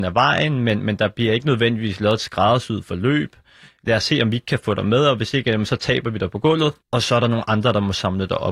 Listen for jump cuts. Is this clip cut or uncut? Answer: cut